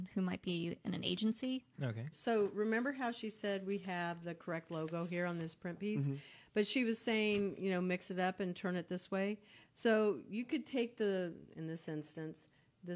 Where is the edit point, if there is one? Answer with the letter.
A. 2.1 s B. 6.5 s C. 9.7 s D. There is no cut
A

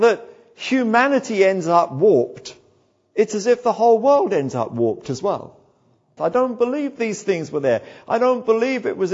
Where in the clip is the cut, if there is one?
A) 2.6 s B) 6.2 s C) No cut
B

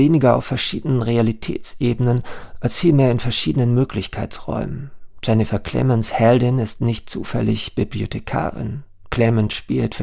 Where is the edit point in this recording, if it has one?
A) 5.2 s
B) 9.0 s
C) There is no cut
B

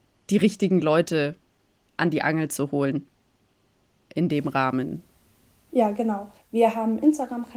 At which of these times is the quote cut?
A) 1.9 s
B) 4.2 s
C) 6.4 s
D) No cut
C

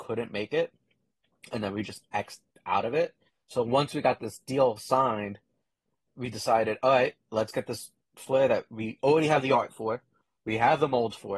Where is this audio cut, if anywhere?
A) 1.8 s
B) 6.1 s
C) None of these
B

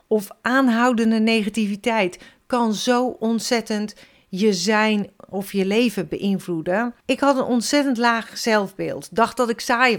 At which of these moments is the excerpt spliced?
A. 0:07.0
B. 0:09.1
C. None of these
A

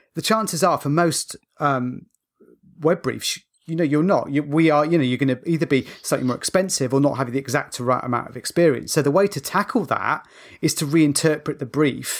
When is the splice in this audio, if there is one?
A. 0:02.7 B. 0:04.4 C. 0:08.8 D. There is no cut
D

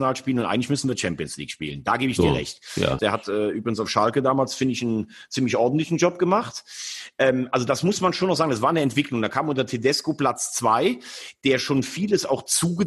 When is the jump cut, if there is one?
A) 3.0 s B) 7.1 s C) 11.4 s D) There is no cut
A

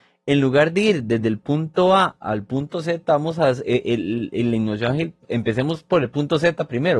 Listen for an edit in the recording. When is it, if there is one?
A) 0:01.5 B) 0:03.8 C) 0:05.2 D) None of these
D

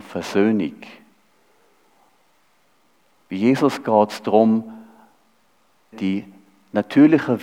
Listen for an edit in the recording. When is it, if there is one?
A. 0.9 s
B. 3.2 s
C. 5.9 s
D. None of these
C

